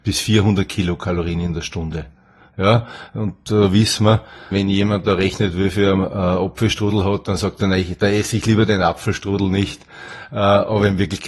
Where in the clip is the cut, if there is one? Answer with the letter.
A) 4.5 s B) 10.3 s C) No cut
A